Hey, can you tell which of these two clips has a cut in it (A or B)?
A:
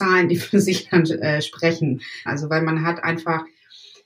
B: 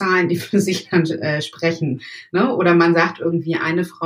A